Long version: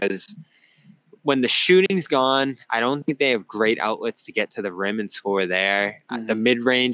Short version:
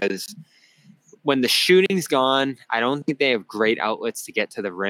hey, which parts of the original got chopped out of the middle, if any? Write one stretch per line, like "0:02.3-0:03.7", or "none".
none